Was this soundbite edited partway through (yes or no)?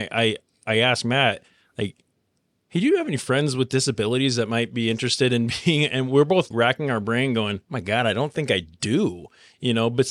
yes